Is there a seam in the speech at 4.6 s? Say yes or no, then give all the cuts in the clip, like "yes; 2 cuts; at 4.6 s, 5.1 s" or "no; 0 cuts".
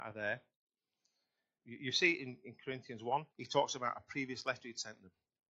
no; 2 cuts; at 1.6 s, 3.3 s